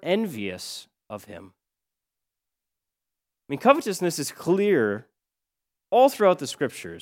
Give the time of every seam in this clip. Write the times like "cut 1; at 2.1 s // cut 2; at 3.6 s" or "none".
none